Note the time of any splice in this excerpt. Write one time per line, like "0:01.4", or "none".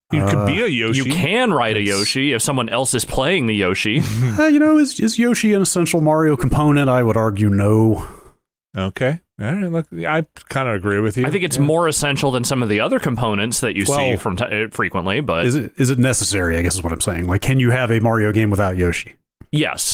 none